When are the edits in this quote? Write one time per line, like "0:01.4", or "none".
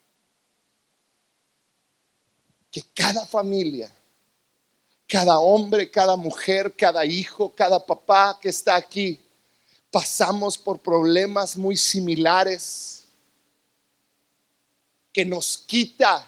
none